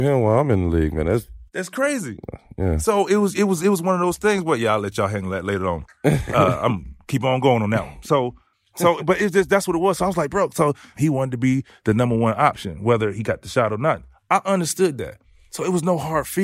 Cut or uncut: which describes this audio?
uncut